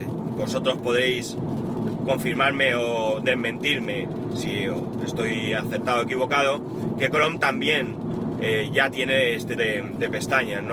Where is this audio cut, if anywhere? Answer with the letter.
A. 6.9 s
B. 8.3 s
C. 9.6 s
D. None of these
C